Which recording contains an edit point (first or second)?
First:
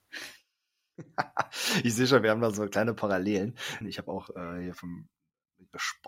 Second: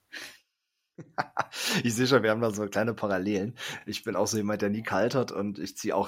first